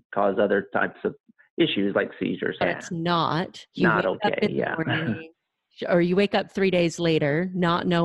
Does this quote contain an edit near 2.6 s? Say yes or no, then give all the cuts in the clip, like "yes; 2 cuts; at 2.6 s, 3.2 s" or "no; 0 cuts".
yes; 2 cuts; at 2.6 s, 3.7 s